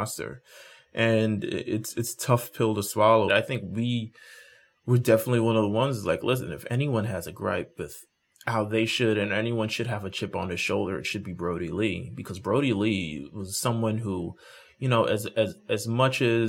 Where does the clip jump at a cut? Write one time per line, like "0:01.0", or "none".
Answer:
0:03.3